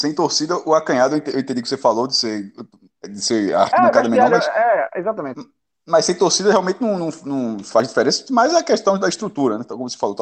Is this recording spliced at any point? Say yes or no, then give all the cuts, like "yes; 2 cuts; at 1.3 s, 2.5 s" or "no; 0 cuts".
no; 0 cuts